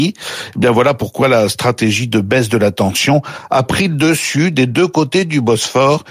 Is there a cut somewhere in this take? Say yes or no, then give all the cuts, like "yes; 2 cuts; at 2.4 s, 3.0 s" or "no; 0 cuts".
no; 0 cuts